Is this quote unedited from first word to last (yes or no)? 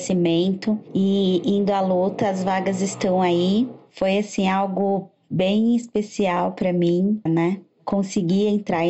no